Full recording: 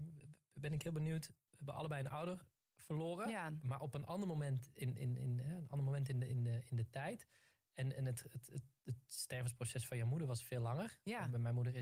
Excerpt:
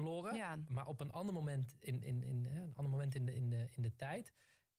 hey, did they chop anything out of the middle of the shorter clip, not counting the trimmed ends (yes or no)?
no